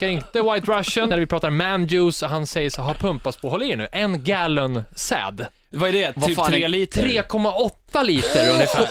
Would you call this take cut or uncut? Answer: cut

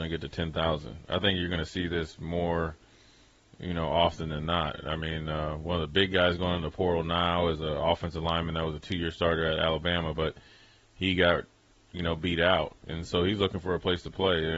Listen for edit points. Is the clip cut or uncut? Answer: uncut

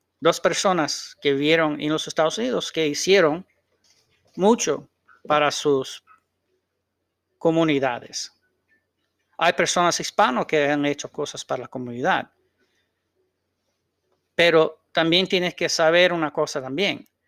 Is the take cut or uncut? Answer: uncut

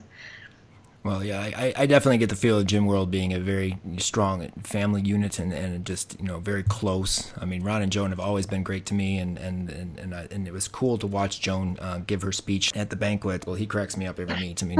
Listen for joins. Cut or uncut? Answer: cut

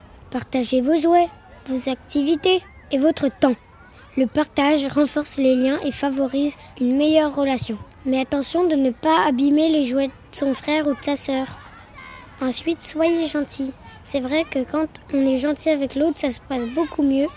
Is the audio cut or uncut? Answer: uncut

